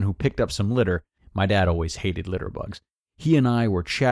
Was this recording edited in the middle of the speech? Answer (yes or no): yes